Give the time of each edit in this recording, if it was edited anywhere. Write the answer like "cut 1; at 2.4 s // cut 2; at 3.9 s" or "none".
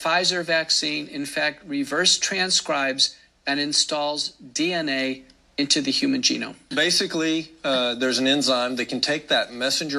none